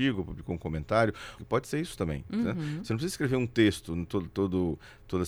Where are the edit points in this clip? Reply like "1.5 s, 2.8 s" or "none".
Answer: 1.4 s